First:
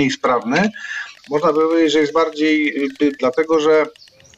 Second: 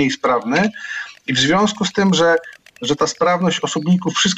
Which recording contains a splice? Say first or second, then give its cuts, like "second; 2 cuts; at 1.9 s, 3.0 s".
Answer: first; 2 cuts; at 1.2 s, 3.2 s